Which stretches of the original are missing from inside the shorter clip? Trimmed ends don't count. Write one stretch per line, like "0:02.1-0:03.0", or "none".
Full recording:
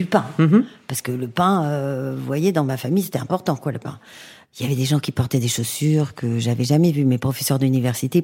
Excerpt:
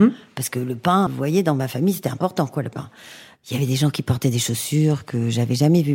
0:01.6-0:02.2